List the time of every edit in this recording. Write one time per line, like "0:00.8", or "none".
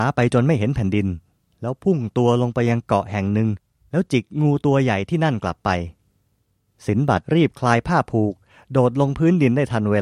0:07.2